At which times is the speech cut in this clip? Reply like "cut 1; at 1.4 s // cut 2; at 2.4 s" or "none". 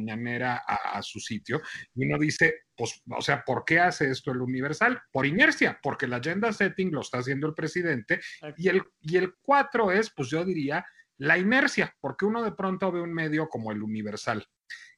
cut 1; at 5.1 s // cut 2; at 8.5 s